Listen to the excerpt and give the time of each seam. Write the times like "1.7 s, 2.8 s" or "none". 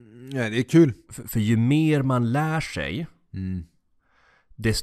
1.1 s